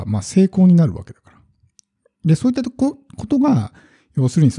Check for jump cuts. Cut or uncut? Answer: uncut